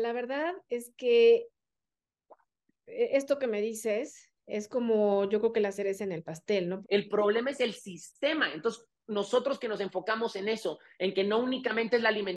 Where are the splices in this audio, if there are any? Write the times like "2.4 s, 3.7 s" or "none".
6.8 s